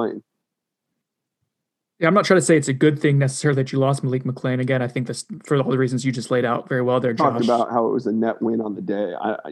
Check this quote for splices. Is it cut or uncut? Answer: uncut